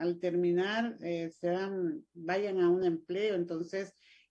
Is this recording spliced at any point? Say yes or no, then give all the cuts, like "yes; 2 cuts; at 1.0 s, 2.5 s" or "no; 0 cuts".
no; 0 cuts